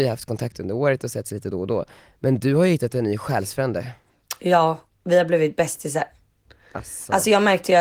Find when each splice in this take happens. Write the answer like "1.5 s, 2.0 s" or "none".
none

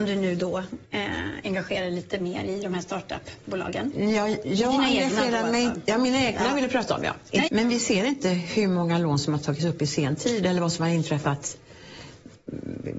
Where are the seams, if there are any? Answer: 7.5 s

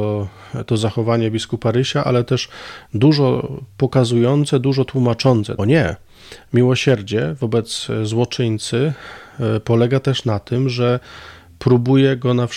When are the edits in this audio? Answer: 5.6 s

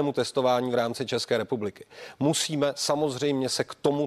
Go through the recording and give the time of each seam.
none

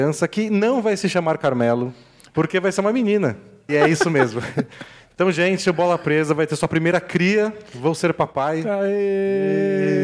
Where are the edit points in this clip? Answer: 2.3 s, 3.7 s

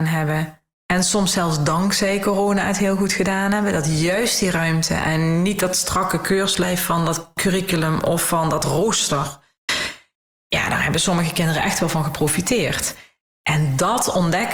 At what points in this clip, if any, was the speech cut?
none

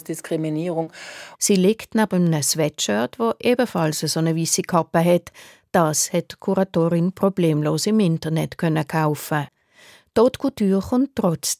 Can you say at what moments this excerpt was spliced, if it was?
1.3 s

